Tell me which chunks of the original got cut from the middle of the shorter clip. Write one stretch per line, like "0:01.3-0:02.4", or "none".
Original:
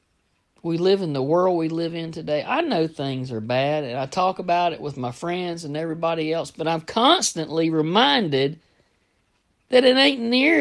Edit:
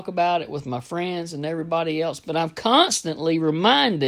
none